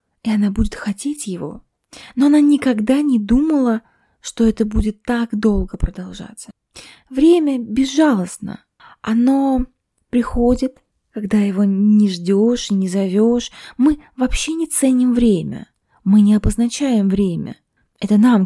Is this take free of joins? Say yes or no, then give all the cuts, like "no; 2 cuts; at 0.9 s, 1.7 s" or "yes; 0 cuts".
yes; 0 cuts